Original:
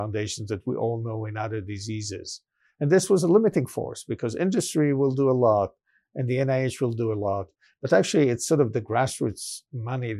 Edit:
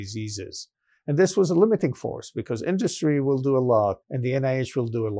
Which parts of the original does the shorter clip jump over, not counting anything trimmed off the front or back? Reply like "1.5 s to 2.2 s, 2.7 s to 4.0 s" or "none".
5.7 s to 6.1 s

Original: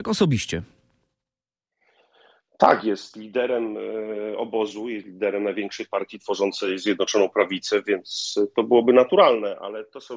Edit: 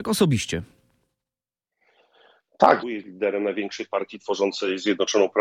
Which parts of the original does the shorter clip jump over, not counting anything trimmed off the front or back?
2.8 s to 4.8 s

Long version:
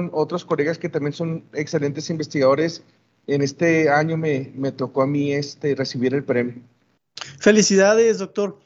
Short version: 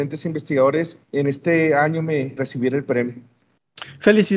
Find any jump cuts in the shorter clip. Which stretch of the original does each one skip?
2.9 s to 3.2 s, 4.5 s to 5.8 s

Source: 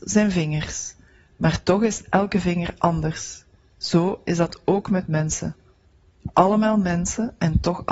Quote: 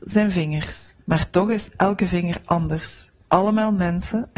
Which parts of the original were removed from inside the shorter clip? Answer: 1.0 s to 1.3 s, 3.6 s to 6.3 s

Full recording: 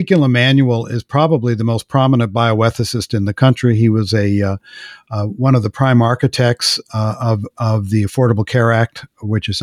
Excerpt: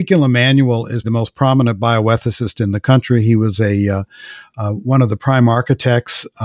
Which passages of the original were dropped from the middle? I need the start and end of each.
1.0 s to 1.6 s

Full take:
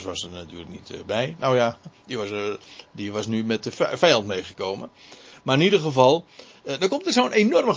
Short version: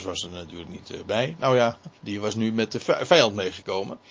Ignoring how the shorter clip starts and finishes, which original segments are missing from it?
2.0 s to 2.9 s

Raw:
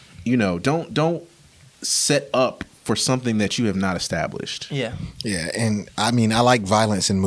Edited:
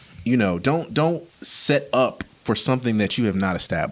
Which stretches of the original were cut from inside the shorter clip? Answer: 1.3 s to 1.7 s

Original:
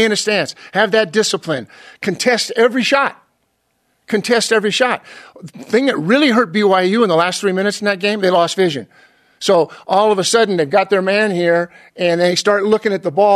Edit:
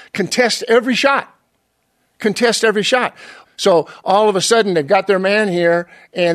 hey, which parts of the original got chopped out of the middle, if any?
5.3 s to 9.3 s

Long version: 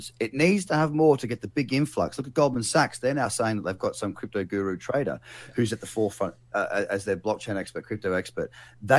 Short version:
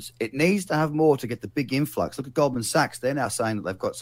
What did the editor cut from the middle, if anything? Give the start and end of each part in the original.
none

